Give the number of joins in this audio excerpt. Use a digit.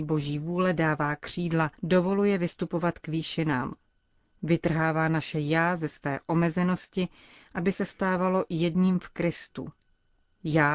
1